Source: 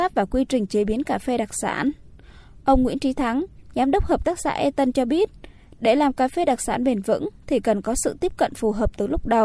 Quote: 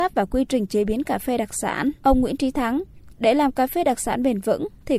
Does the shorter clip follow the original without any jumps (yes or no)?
no